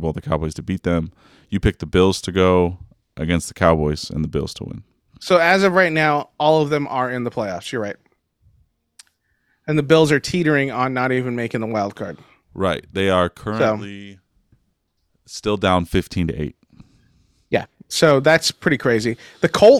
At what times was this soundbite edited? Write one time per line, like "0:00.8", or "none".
none